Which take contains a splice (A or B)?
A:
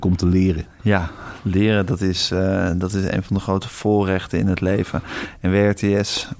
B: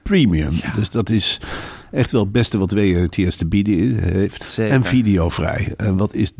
B